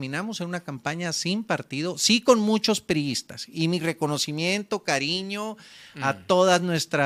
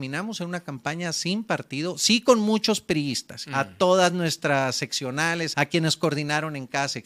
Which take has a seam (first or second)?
second